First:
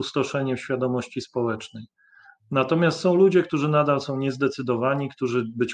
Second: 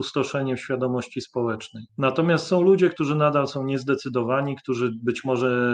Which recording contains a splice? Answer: second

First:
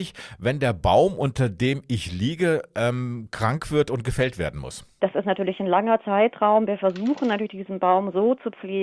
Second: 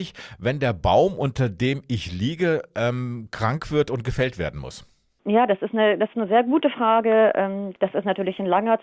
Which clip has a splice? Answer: first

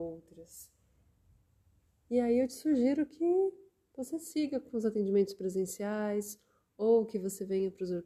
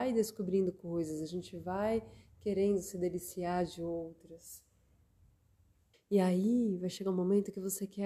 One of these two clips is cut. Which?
second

